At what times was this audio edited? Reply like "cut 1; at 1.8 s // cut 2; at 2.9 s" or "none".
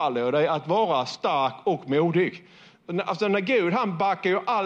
none